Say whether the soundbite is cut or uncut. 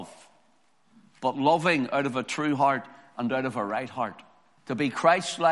cut